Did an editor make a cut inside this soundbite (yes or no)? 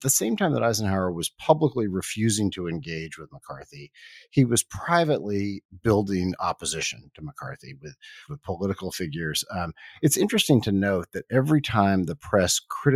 yes